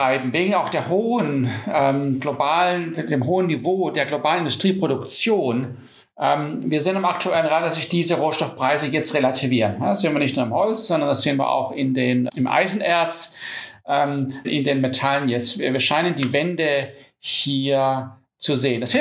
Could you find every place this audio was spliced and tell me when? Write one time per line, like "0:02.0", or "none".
0:12.3
0:14.4

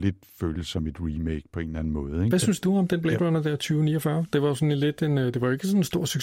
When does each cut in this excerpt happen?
0:02.3

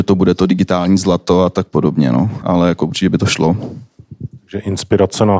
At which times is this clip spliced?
none

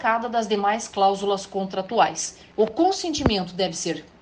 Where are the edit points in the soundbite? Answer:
0:02.5

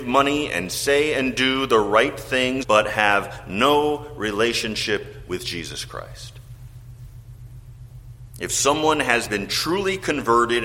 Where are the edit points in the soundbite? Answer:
0:02.6

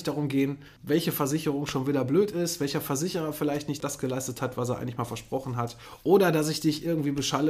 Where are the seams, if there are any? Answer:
none

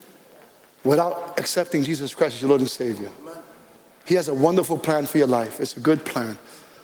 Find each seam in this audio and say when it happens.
none

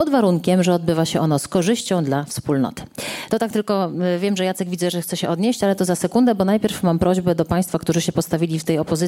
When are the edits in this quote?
none

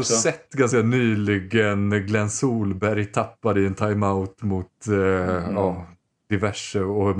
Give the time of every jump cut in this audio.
none

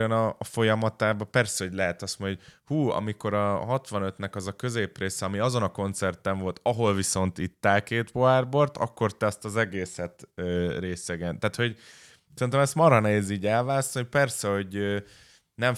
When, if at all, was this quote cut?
none

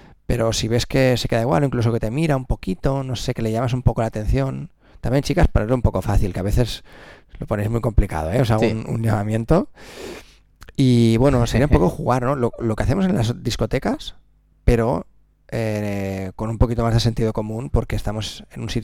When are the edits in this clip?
none

